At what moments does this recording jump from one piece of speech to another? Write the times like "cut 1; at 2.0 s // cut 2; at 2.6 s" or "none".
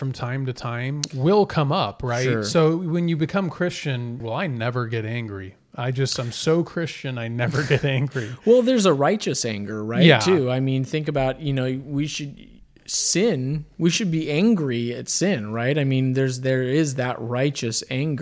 cut 1; at 4.2 s

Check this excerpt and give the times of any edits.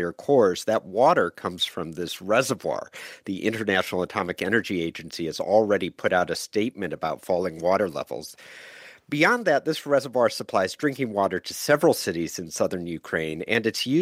none

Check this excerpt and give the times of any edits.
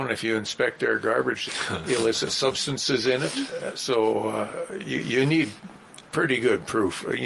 cut 1; at 1.5 s

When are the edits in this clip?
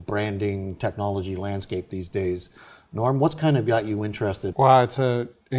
cut 1; at 4.5 s

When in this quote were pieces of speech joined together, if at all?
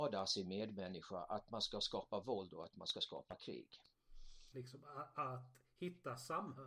cut 1; at 4.5 s

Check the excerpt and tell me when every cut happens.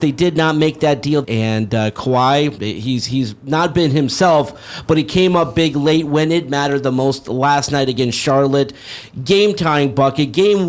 cut 1; at 1.2 s // cut 2; at 2.6 s

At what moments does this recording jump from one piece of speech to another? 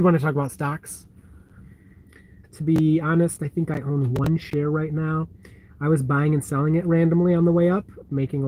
cut 1; at 2.4 s

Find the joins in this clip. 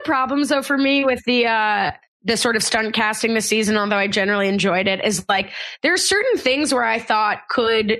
none

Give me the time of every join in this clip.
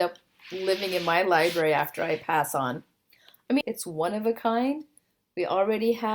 cut 1; at 3.6 s

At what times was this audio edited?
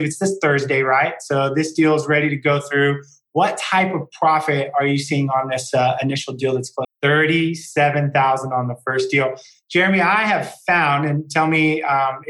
cut 1; at 6.8 s

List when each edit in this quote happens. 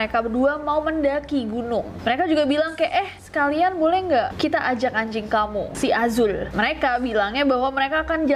none

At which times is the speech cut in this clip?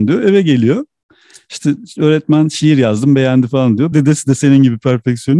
cut 1; at 3.9 s

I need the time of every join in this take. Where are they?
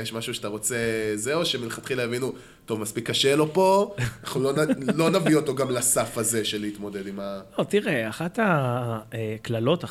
none

